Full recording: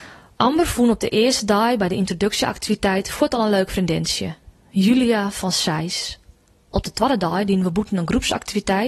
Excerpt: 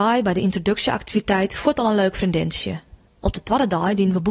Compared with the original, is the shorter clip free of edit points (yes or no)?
no